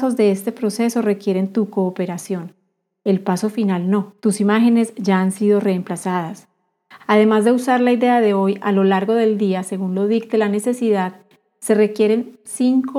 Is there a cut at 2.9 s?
no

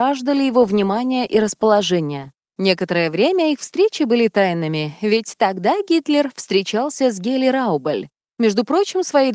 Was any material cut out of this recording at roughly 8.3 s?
no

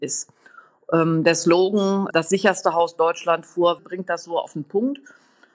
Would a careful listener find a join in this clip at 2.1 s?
yes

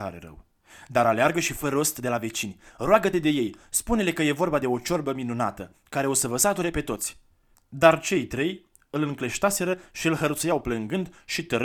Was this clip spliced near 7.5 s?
yes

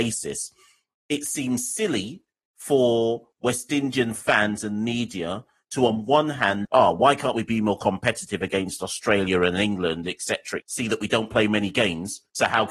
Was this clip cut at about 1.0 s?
no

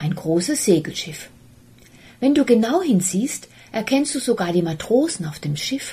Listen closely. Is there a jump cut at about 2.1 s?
yes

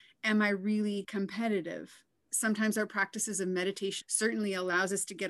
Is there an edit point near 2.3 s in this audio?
yes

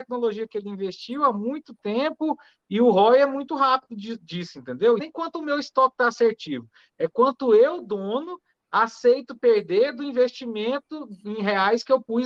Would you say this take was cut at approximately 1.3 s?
no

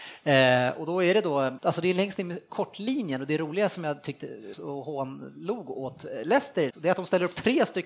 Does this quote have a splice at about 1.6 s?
yes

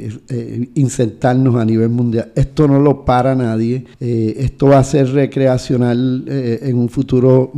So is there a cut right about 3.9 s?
yes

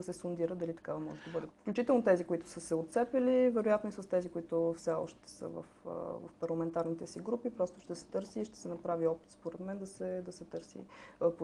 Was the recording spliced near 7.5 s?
no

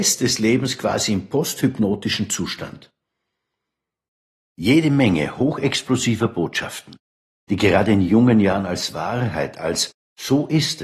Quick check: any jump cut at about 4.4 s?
yes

